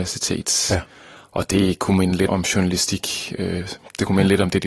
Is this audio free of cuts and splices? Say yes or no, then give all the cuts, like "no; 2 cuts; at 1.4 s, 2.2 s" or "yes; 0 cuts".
no; 1 cut; at 2.3 s